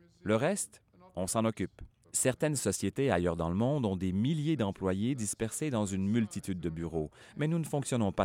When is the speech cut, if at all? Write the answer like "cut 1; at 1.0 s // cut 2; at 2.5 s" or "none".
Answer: cut 1; at 2.0 s